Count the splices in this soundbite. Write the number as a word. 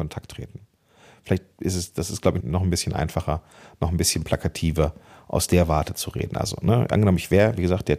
one